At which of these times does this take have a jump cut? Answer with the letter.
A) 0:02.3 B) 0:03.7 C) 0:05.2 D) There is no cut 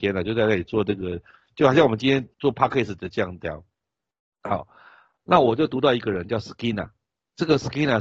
A